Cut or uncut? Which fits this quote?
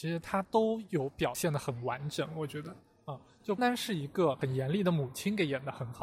cut